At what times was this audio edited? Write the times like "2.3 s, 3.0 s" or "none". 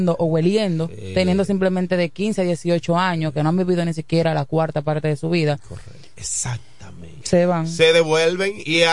6.2 s, 7.2 s